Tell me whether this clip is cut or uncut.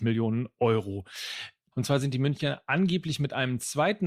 cut